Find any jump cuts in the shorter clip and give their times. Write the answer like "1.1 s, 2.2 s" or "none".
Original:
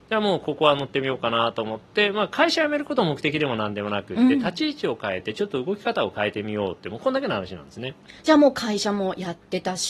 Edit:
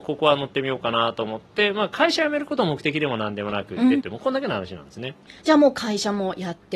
4.0 s